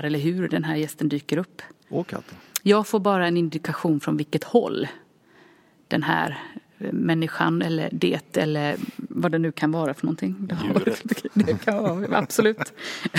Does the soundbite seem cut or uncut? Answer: uncut